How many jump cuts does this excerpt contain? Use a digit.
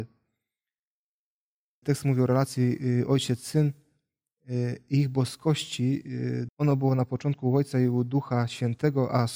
2